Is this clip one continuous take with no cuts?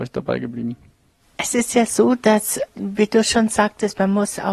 yes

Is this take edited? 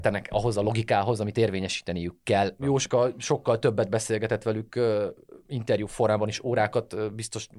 yes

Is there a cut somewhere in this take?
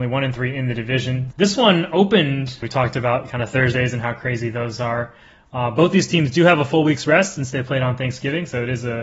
yes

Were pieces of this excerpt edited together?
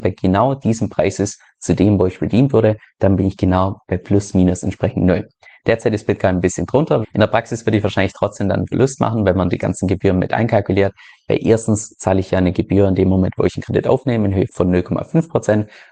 yes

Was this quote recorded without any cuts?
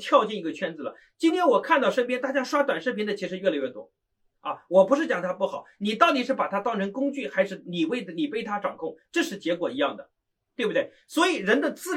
yes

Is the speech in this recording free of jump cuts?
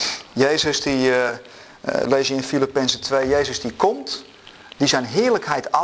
yes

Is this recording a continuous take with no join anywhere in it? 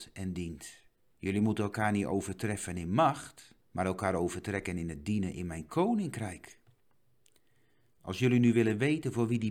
no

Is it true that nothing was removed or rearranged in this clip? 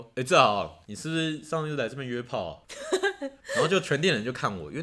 yes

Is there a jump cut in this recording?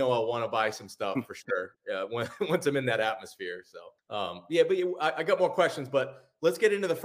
yes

